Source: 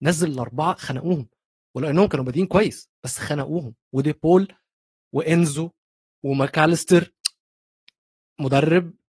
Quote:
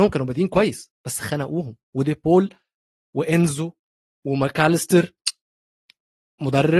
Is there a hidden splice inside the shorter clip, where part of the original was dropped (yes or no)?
no